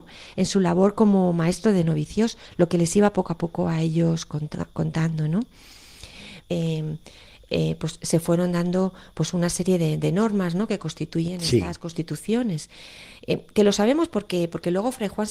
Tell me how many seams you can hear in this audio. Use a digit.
1